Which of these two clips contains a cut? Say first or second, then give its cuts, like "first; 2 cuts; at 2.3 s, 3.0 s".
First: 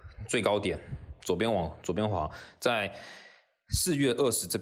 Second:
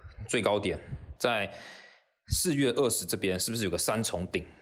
second; 1 cut; at 1.2 s